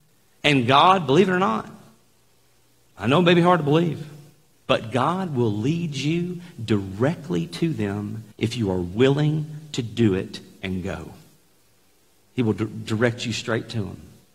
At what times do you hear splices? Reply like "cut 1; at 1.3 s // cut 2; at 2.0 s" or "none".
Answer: cut 1; at 8.3 s